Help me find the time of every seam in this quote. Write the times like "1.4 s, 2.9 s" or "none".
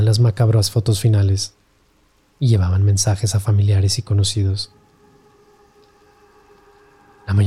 none